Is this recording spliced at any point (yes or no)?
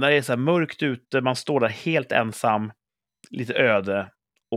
no